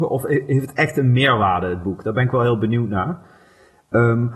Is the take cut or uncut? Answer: uncut